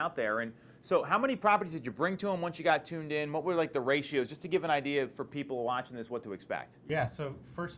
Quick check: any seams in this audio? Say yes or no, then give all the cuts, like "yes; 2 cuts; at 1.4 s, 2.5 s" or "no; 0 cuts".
no; 0 cuts